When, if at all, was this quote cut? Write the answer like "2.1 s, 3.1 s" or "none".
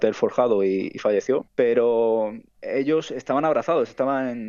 1.5 s